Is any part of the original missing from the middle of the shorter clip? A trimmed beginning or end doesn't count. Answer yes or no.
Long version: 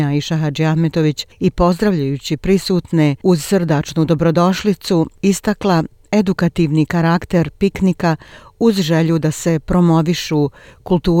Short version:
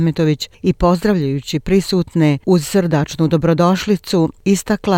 no